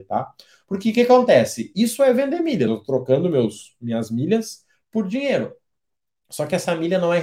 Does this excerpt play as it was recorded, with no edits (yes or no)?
yes